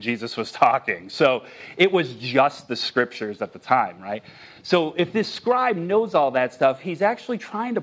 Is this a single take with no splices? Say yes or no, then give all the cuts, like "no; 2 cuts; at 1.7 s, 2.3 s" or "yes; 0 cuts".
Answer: yes; 0 cuts